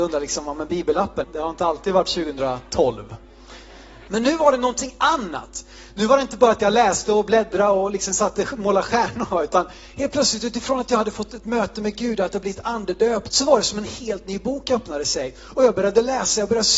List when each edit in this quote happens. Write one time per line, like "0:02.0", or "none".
0:01.2
0:04.1
0:13.3